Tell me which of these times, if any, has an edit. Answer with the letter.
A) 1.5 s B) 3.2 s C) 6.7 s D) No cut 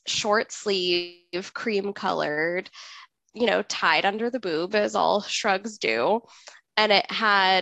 B